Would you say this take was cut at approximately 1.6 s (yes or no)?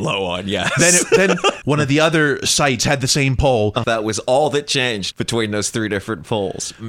yes